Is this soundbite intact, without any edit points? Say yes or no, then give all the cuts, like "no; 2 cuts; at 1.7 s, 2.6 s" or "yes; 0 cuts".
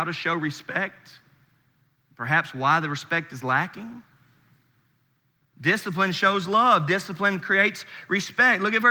yes; 0 cuts